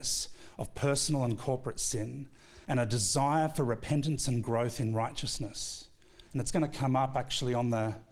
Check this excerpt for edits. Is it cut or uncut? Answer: cut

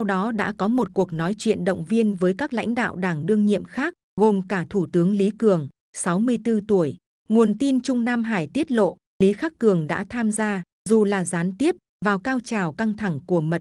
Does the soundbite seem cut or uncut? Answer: cut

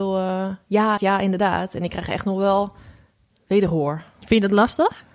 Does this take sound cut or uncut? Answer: cut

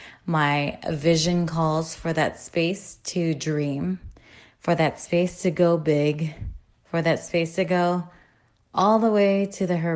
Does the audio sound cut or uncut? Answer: uncut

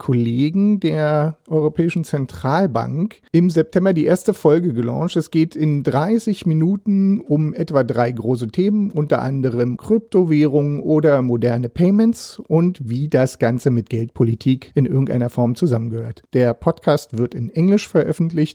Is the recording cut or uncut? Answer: cut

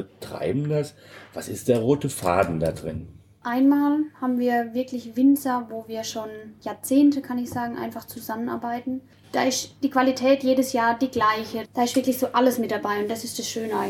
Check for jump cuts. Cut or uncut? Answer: cut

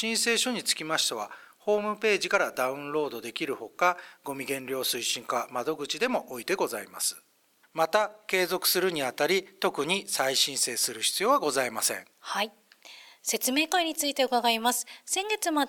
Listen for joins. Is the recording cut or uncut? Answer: cut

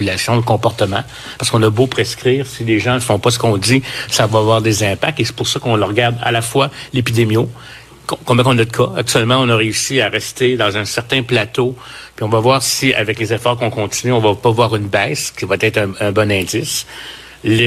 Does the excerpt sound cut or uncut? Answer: uncut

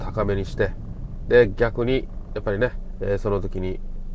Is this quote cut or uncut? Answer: cut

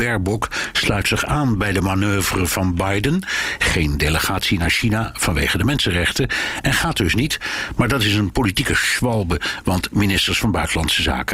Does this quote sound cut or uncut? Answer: uncut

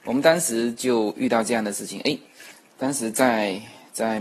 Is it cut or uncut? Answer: uncut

